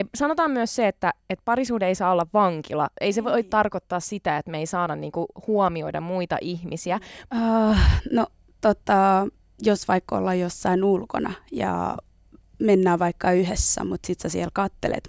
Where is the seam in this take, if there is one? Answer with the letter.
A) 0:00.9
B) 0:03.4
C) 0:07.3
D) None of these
C